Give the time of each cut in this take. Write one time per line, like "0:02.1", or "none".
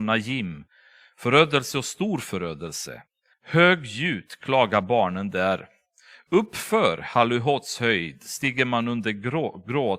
0:03.3